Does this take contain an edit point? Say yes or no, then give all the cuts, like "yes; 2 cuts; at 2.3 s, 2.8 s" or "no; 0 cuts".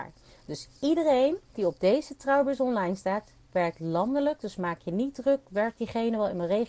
no; 0 cuts